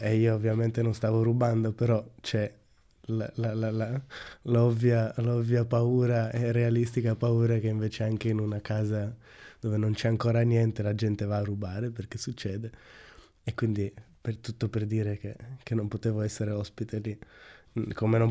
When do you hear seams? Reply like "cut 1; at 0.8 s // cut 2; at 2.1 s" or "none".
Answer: none